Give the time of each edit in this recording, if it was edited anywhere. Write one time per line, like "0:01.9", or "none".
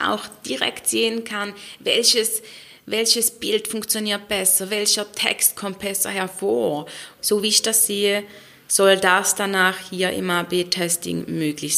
0:07.2